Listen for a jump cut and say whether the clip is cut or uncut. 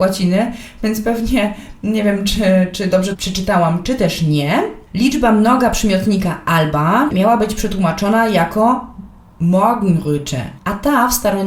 cut